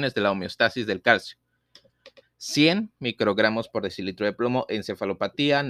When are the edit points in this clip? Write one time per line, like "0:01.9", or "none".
0:02.2